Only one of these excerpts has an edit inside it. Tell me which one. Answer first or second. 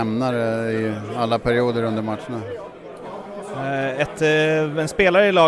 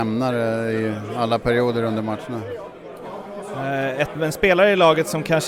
second